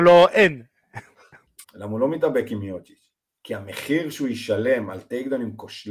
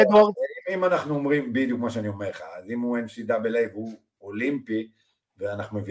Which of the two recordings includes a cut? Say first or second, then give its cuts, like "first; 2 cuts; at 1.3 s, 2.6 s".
first; 1 cut; at 1.6 s